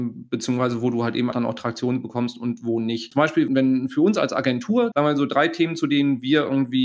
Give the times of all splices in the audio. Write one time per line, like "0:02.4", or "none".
0:01.3
0:03.1
0:04.9